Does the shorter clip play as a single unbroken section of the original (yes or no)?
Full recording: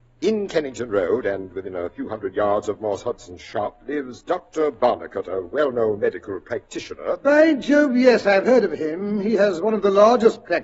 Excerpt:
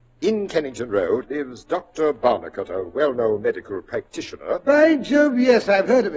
no